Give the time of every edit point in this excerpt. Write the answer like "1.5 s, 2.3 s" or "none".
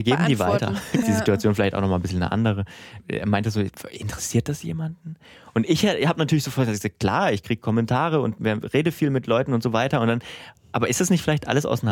1.0 s